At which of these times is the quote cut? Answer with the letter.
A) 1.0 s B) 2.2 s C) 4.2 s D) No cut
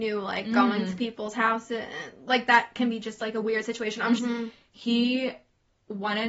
C